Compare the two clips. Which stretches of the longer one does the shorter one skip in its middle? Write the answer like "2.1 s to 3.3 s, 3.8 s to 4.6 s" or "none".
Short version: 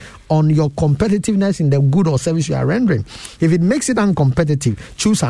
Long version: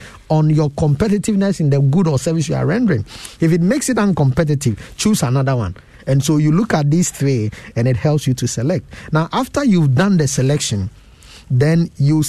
none